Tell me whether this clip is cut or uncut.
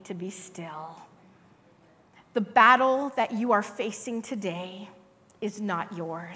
uncut